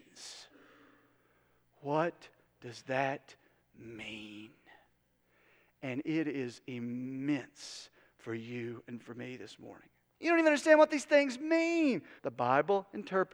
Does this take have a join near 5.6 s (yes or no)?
no